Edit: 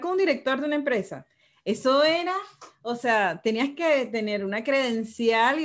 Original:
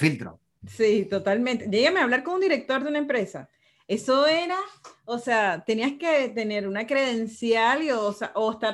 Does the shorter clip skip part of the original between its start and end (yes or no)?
no